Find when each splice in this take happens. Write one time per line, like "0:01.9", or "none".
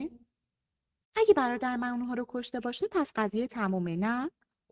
0:01.0